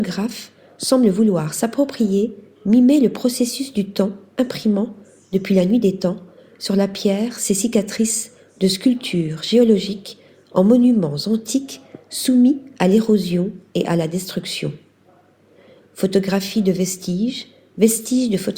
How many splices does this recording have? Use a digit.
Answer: 0